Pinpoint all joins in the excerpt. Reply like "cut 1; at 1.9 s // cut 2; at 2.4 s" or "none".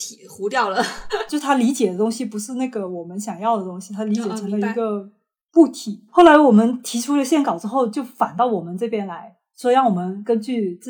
cut 1; at 1.3 s // cut 2; at 6.1 s